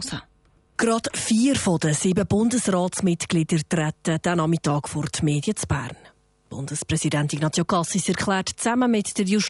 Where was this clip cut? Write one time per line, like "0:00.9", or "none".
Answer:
none